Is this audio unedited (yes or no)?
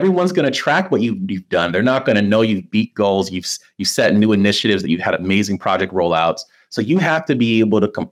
yes